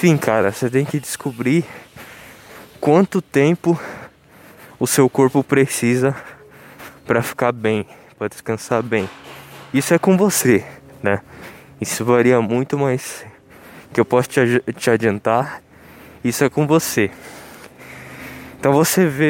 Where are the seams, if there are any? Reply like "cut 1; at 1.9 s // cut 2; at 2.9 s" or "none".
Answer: none